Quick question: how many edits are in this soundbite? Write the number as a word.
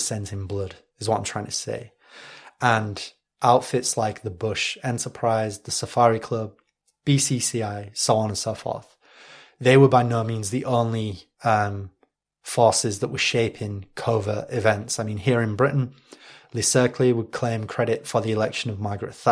zero